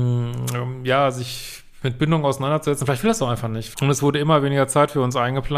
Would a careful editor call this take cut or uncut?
cut